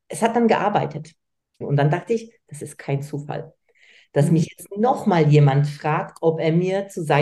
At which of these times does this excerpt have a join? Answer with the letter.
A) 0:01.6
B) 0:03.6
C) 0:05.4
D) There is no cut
A